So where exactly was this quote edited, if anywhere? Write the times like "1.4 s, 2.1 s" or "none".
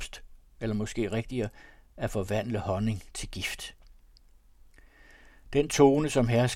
none